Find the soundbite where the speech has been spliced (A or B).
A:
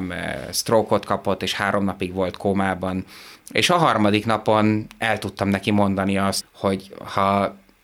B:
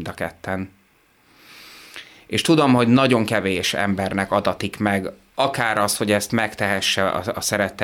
A